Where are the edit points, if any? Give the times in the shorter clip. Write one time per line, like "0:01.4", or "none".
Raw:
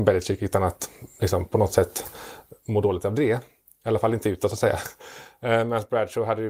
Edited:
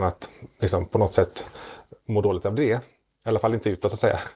none